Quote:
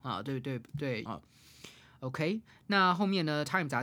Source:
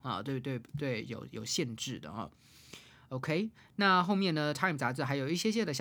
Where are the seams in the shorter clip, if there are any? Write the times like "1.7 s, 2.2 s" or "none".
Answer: 1.1 s